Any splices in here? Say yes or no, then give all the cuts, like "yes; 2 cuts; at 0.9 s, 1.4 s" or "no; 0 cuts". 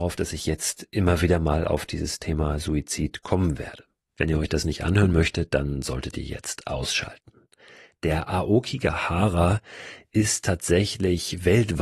no; 0 cuts